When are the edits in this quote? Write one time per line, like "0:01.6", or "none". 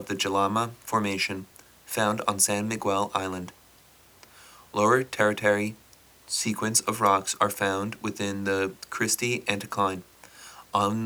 none